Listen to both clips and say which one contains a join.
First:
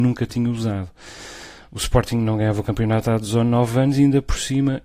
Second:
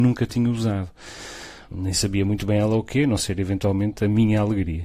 second; 1 cut; at 1.7 s

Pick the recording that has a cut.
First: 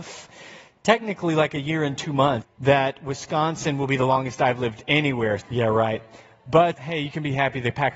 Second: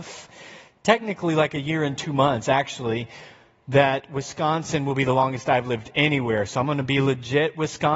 first; 3 cuts; at 2.4 s, 5.4 s, 6.8 s

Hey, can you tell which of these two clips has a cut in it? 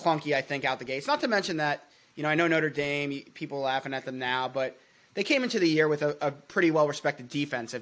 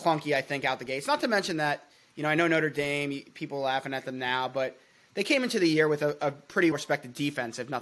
second; 1 cut; at 6.7 s

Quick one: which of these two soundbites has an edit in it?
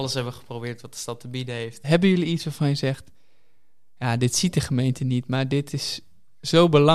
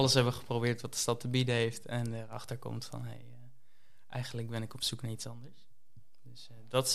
first; 1 cut; at 1.8 s

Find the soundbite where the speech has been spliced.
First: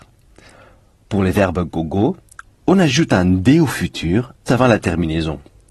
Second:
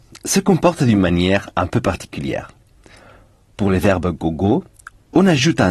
first; 1 cut; at 4.5 s

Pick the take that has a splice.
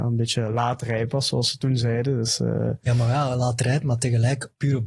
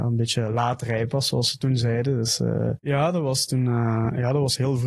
second; 1 cut; at 2.8 s

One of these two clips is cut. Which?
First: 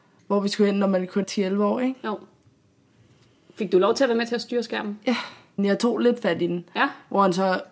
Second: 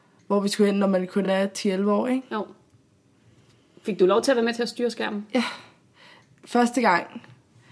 first; 2 cuts; at 1.2 s, 5.6 s

